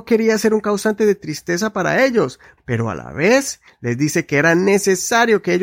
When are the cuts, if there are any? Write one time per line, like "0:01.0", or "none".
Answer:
0:02.6